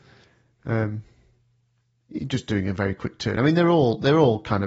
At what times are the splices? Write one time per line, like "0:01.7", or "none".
none